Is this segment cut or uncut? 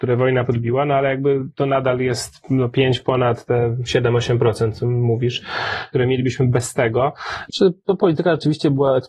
cut